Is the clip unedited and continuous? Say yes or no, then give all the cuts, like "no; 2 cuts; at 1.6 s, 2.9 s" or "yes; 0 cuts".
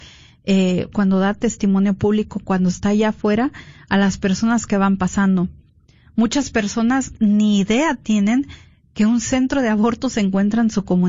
no; 1 cut; at 0.9 s